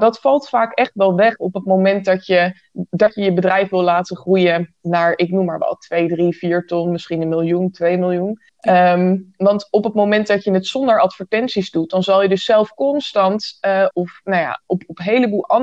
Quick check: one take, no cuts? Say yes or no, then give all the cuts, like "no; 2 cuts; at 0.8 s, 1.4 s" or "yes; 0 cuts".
no; 2 cuts; at 8.5 s, 13.9 s